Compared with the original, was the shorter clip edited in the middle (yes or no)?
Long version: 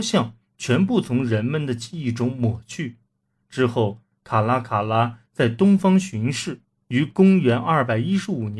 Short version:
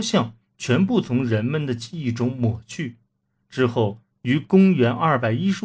yes